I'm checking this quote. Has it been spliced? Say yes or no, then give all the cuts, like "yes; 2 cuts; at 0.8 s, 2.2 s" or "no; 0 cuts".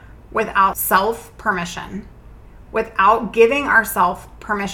no; 0 cuts